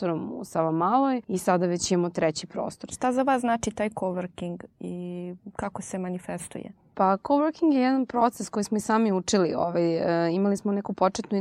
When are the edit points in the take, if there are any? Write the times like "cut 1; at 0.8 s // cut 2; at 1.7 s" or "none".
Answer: cut 1; at 1.2 s // cut 2; at 2.9 s